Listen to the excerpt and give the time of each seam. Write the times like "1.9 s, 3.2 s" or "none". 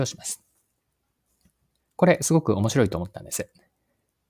1.8 s